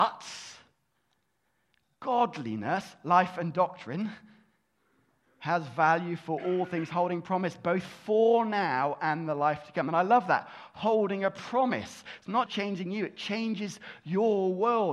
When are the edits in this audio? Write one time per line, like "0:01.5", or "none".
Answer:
0:12.5